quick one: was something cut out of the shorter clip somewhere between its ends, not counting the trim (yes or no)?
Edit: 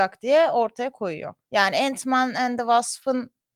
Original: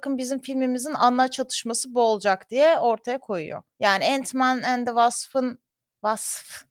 no